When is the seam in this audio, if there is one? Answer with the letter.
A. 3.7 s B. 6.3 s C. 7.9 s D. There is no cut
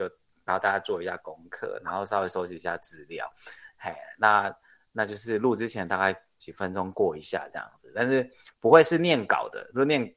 D